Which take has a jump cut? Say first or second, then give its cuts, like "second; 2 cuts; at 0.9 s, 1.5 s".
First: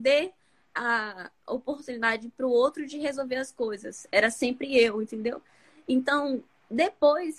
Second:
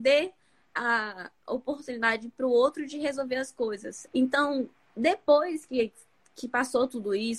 second; 1 cut; at 4.1 s